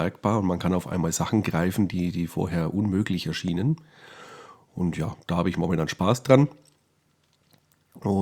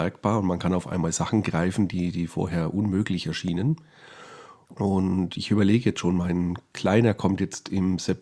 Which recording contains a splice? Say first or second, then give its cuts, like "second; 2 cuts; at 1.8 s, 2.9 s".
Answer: second; 1 cut; at 4.7 s